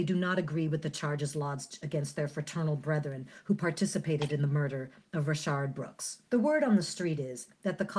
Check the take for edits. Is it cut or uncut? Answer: cut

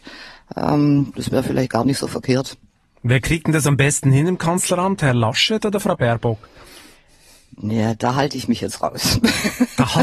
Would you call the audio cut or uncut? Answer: cut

